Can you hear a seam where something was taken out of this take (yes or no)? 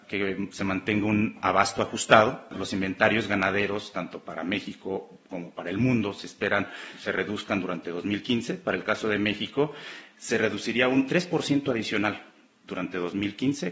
no